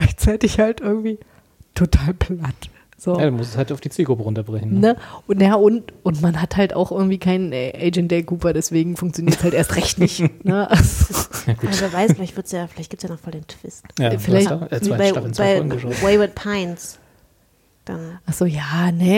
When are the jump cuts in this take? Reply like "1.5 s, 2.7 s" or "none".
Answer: 14.5 s